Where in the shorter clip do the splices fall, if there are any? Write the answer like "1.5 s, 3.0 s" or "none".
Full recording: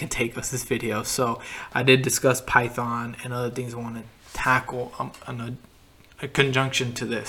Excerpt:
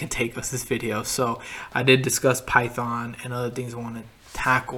none